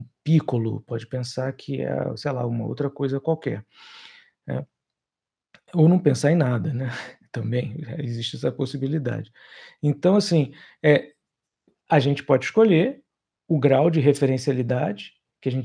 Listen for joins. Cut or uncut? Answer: uncut